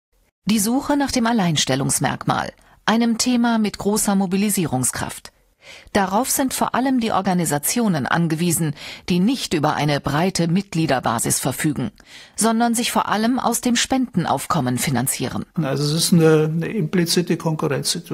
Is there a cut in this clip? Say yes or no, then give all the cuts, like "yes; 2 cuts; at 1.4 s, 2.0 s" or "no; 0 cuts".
yes; 1 cut; at 15.6 s